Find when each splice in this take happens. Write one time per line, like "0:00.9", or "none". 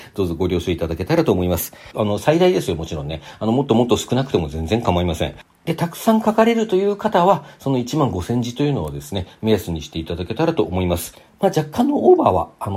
0:01.9